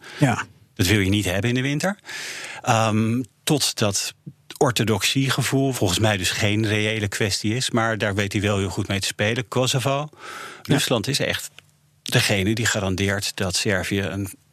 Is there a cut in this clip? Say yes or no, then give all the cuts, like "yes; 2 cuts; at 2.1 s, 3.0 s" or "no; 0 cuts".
yes; 1 cut; at 5.7 s